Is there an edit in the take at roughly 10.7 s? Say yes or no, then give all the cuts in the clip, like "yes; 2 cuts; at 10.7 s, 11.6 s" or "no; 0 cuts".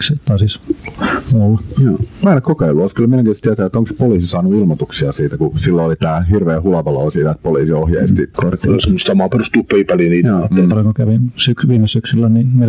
yes; 2 cuts; at 8.3 s, 10.7 s